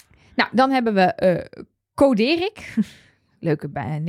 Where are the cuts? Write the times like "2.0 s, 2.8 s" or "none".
none